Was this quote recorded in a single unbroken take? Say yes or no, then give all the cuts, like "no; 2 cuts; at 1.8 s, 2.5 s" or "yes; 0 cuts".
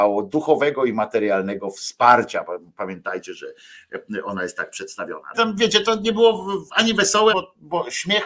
no; 2 cuts; at 5.3 s, 7.3 s